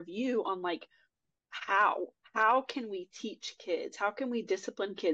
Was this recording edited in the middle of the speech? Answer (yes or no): no